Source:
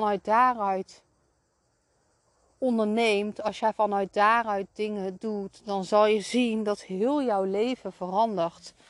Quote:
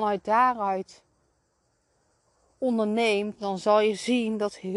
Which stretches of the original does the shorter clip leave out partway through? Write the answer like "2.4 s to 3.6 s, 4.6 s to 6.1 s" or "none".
3.3 s to 5.6 s